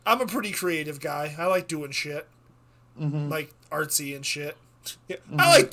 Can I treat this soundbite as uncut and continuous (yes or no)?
yes